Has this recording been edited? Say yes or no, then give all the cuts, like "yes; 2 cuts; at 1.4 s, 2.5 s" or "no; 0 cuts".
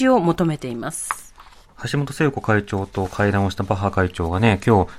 no; 0 cuts